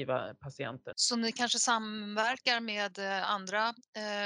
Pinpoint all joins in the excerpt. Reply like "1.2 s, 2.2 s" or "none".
0.9 s